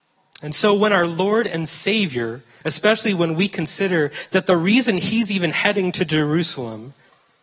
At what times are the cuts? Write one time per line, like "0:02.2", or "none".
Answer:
0:02.6

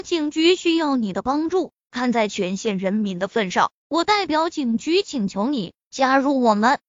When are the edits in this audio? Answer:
none

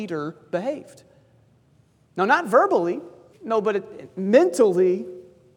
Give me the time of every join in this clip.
0:03.3

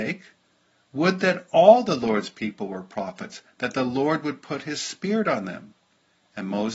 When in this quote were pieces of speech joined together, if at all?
none

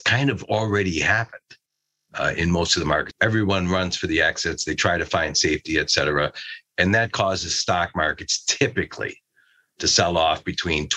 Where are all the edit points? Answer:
0:03.1

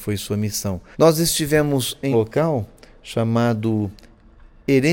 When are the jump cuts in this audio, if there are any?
0:00.9
0:02.1

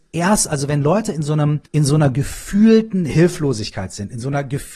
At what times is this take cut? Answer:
0:01.7

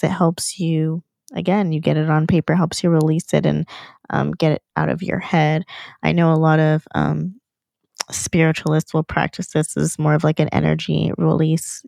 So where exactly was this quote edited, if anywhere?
none

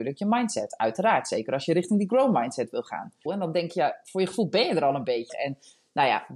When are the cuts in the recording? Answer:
0:03.3
0:05.3

